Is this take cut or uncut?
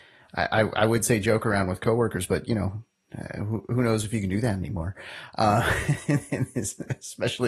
uncut